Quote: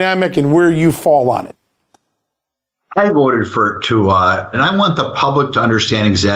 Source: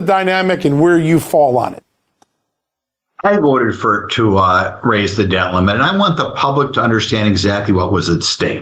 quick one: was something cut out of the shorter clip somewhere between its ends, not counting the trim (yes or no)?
yes